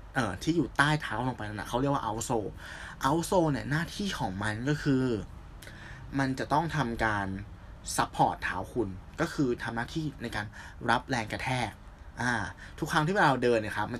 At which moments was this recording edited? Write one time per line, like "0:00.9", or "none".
none